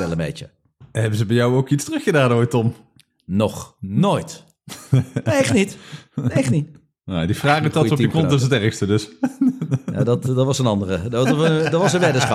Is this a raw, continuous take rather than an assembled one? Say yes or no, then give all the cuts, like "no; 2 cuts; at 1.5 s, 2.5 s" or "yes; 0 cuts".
yes; 0 cuts